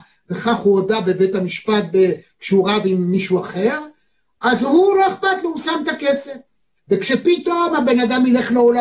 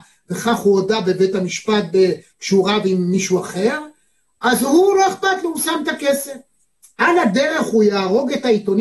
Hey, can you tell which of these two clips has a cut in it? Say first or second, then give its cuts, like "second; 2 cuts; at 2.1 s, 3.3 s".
first; 1 cut; at 6.8 s